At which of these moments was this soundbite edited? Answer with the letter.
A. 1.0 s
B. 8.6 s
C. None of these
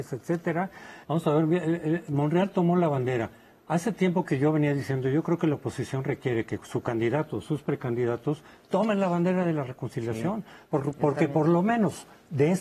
A